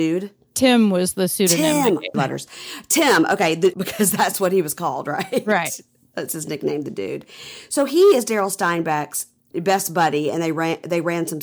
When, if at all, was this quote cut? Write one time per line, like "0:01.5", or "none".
0:02.1
0:03.7
0:09.5